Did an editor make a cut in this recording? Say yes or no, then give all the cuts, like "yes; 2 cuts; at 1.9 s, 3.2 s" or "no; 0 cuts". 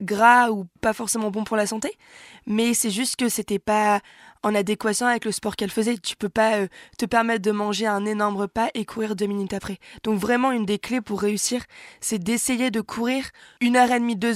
no; 0 cuts